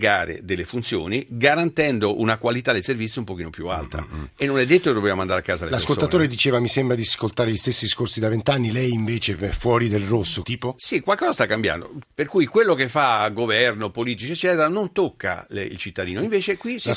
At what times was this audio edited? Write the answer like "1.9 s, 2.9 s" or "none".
10.4 s, 12.0 s